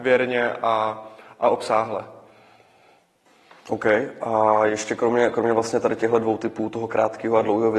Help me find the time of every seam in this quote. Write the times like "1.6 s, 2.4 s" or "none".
none

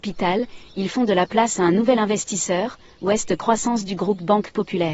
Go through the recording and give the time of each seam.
none

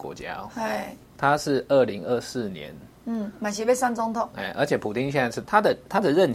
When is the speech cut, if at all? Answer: 5.4 s

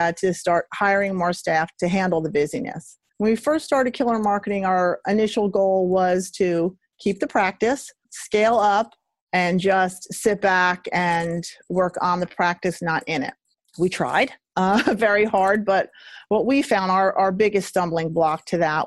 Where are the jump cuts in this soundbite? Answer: 9.2 s

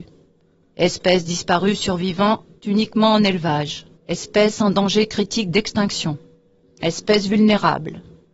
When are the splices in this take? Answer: 4.0 s, 6.6 s

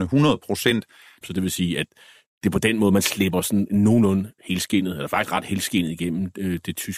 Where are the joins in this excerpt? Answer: 1.2 s

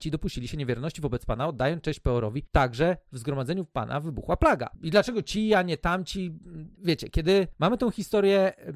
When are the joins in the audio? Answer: 4.8 s, 6.7 s

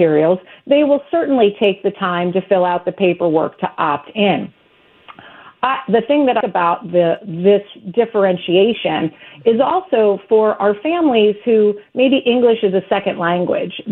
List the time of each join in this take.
6.4 s

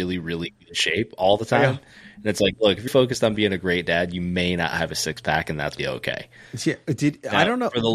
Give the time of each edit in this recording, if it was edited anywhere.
2.9 s, 5.8 s

